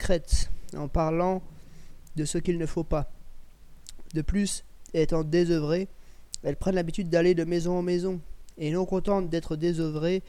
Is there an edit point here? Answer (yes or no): yes